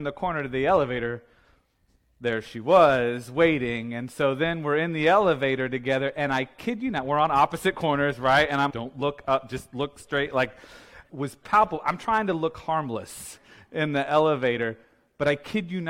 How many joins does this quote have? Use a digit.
2